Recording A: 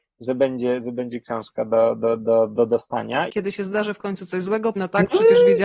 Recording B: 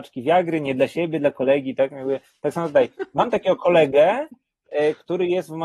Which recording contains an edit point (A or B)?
A